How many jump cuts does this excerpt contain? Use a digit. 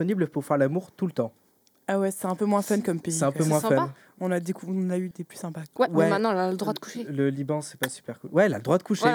1